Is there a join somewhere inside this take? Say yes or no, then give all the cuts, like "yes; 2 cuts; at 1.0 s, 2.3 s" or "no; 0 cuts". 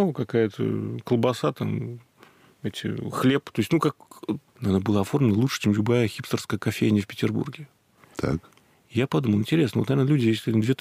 yes; 1 cut; at 4.5 s